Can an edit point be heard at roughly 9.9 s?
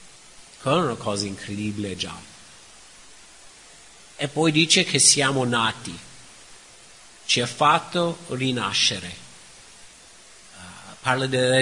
no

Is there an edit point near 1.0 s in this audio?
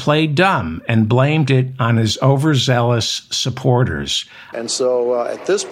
no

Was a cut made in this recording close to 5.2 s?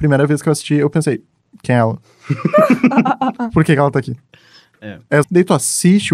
yes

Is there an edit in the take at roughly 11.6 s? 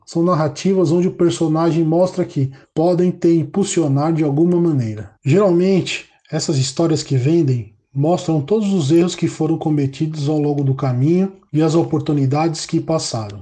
no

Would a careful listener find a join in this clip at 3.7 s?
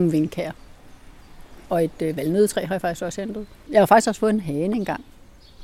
yes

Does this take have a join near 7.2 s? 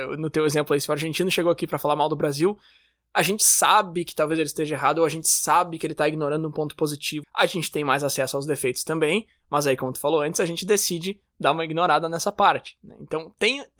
yes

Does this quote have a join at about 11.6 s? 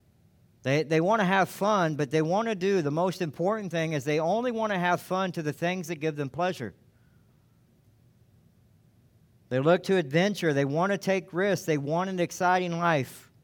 no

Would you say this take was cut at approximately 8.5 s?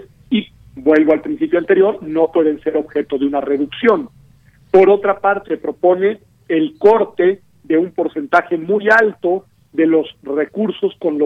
no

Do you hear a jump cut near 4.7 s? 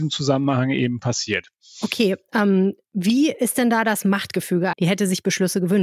yes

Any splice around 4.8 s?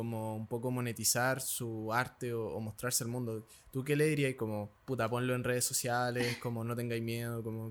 yes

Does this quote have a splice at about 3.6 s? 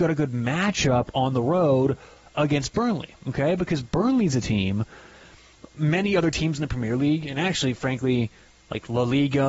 no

